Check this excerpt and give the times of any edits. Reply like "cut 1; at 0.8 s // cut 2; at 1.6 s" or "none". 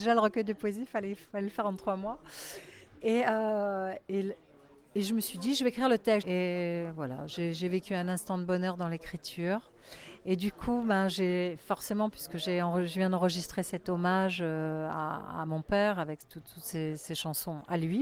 cut 1; at 6.2 s